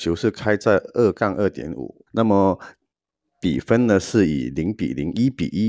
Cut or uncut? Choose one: cut